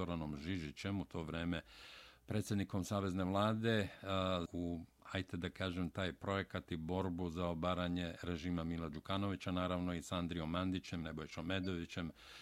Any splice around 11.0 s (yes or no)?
yes